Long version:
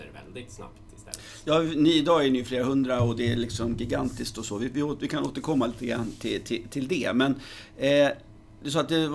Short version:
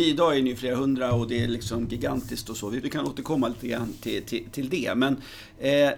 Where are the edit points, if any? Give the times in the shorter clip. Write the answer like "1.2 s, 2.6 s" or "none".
2.8 s